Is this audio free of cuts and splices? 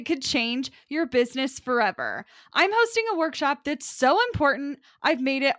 yes; 0 cuts

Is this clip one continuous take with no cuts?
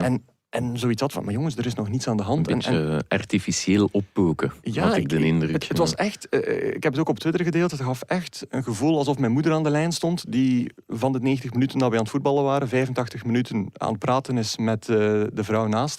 yes; 0 cuts

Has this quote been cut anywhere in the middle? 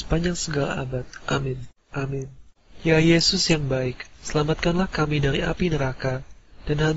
yes; 2 cuts; at 1.9 s, 4.1 s

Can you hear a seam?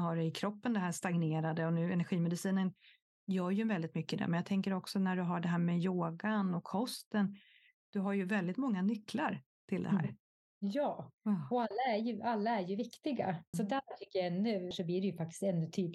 yes; 3 cuts; at 11.2 s, 13.5 s, 14.7 s

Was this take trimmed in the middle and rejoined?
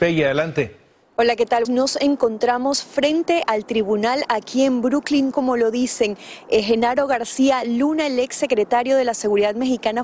yes; 2 cuts; at 1.6 s, 5.3 s

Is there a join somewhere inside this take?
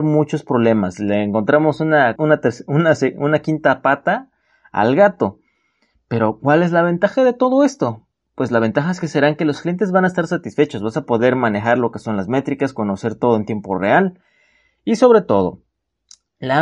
yes; 1 cut; at 2.2 s

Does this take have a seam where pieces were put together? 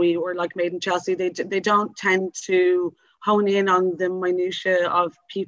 no; 0 cuts

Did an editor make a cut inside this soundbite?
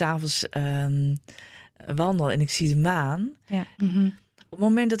yes; 1 cut; at 3.7 s

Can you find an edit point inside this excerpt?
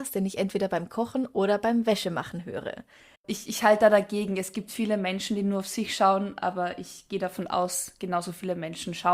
yes; 1 cut; at 3.1 s

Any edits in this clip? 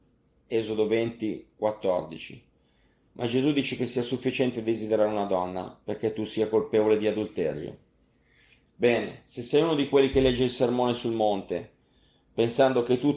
no; 0 cuts

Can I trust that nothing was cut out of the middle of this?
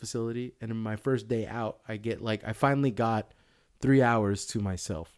yes; 0 cuts

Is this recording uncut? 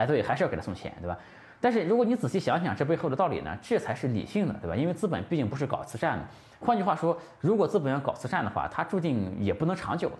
yes; 0 cuts

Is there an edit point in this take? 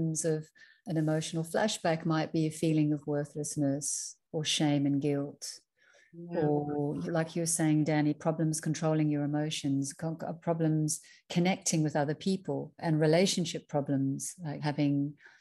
no; 0 cuts

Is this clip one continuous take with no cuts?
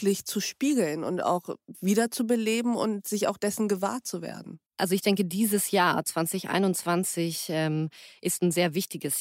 no; 1 cut; at 4.7 s

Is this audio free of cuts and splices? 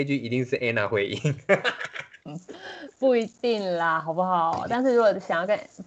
yes; 0 cuts

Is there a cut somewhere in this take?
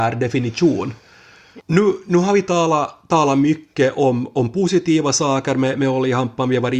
yes; 1 cut; at 1.6 s

